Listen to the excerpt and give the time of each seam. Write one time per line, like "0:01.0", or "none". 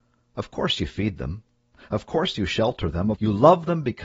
0:03.1